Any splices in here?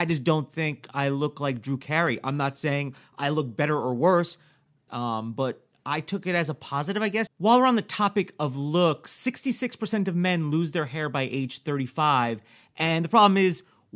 yes; 2 cuts; at 4.9 s, 7.3 s

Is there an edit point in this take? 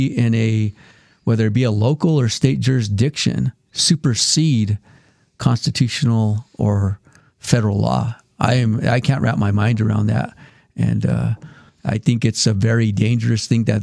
no; 0 cuts

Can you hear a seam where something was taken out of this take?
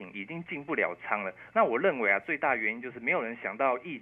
yes; 1 cut; at 1.5 s

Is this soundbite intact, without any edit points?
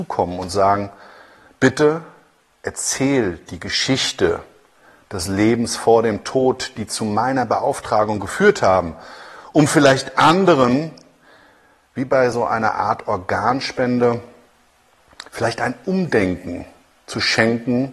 yes; 0 cuts

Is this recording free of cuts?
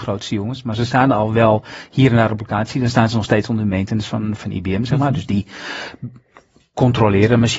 no; 1 cut; at 4.4 s

